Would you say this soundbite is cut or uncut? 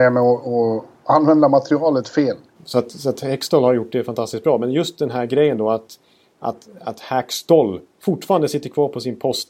cut